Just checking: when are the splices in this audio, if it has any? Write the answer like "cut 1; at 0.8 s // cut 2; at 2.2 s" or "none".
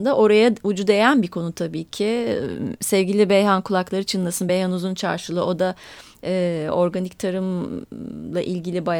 none

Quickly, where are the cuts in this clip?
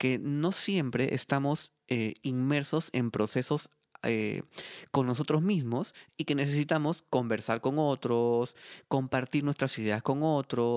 none

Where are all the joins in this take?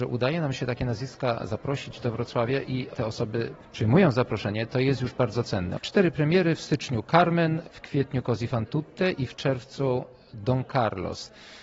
cut 1; at 5.8 s // cut 2; at 7.6 s

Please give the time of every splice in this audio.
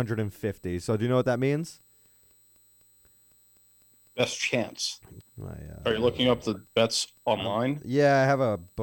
cut 1; at 5.2 s

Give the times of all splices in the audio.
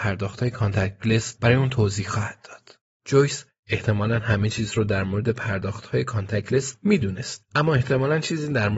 none

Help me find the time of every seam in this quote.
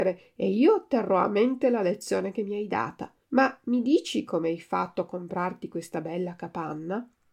cut 1; at 3.2 s

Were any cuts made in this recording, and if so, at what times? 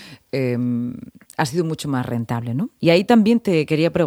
cut 1; at 2.8 s

